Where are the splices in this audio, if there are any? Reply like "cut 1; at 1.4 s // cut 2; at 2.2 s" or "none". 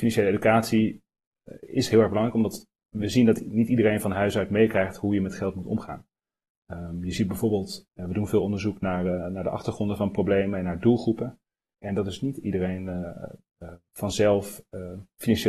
cut 1; at 7.9 s // cut 2; at 11.7 s

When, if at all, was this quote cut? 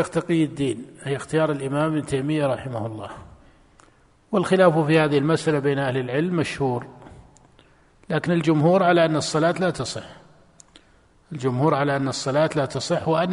none

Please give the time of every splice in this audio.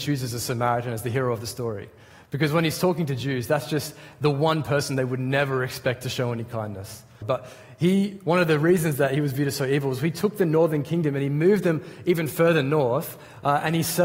cut 1; at 7.2 s

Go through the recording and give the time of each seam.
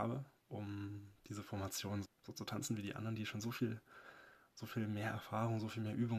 cut 1; at 2.0 s

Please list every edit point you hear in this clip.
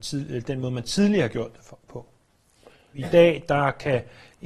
cut 1; at 2.9 s

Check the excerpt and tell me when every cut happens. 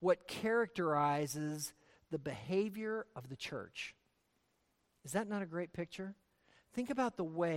none

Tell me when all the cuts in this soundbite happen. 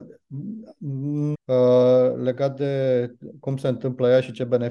cut 1; at 1.3 s

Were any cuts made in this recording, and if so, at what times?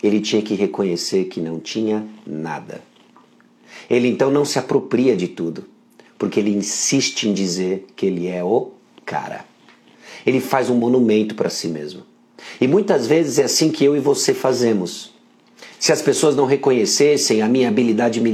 cut 1; at 15.8 s

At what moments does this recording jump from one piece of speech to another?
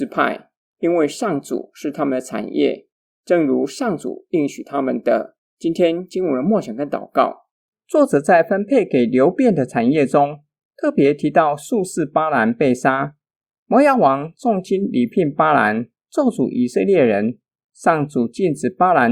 cut 1; at 5.4 s

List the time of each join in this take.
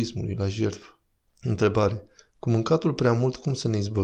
cut 1; at 1.3 s

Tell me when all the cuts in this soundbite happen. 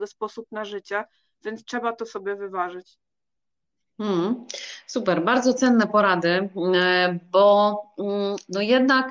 none

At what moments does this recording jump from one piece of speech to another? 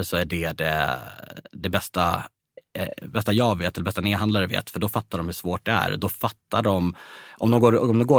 none

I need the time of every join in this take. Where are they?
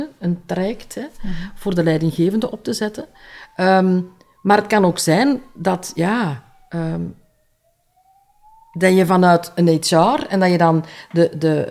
none

